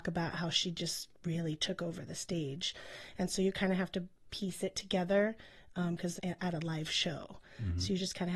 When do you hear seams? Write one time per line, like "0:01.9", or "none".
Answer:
0:06.2